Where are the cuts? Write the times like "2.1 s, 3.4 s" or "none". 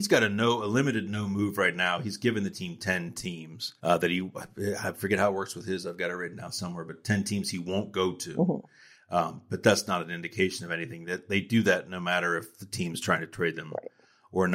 3.8 s

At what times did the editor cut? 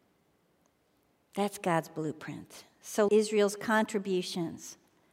3.1 s

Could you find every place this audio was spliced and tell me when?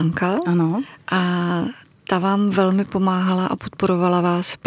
none

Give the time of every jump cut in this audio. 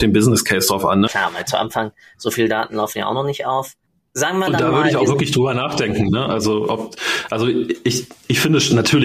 1.1 s

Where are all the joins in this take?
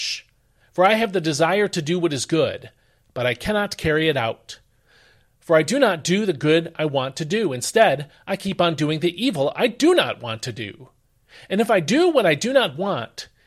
none

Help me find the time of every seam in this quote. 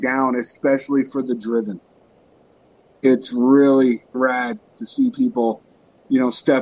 4.1 s

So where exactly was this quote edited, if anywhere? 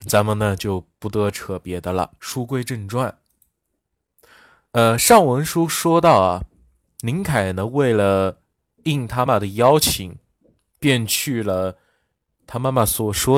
9.3 s

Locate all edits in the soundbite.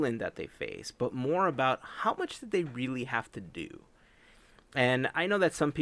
none

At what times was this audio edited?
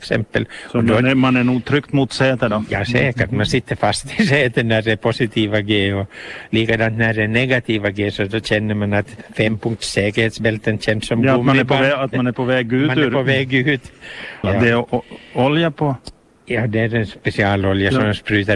14.4 s

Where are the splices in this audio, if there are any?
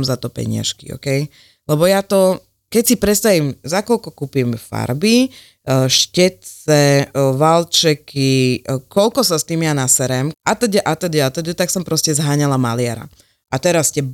10.3 s

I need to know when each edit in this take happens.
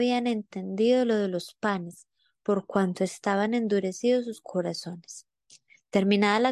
none

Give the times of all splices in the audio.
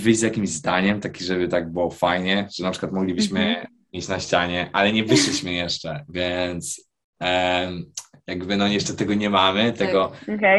none

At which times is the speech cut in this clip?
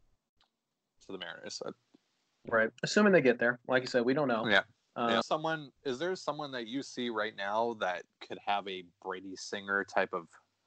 5.2 s

